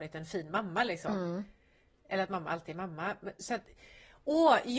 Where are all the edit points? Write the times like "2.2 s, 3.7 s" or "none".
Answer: none